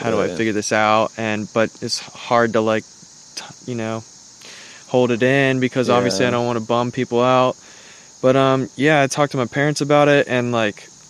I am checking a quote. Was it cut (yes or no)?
no